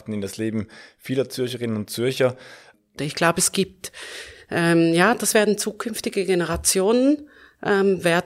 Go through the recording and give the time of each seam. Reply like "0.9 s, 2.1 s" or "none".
3.0 s